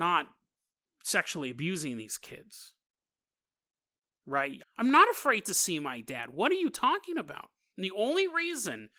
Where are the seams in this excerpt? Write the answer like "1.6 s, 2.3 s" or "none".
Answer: 4.6 s